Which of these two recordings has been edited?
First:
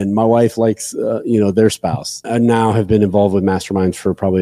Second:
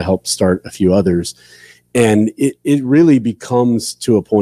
first; 1 cut; at 2.2 s

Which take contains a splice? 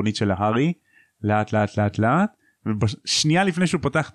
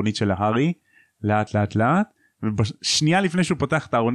second; 1 cut; at 1.5 s

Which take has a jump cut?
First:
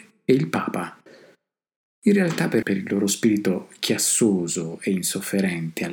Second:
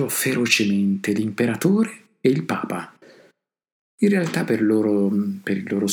first; 1 cut; at 2.6 s

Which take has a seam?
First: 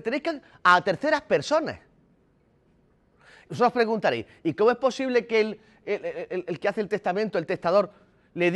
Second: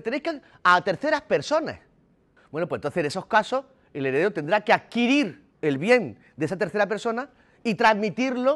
second; 2 cuts; at 2.4 s, 5.5 s

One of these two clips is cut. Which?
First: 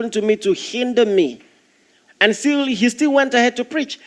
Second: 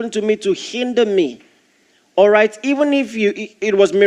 first; 1 cut; at 2.1 s

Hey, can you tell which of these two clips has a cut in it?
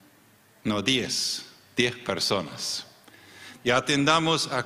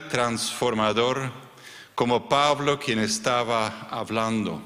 first; 1 cut; at 3.6 s

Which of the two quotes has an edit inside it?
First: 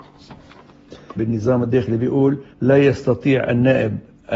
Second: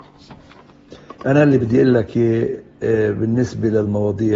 first; 2 cuts; at 1.2 s, 2.5 s

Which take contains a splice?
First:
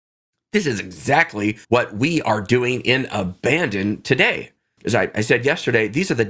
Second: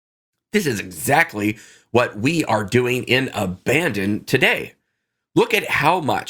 first; 2 cuts; at 1.6 s, 4.8 s

